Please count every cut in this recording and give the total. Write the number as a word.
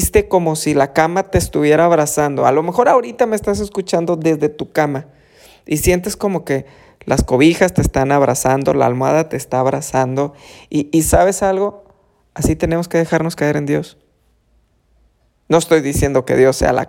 zero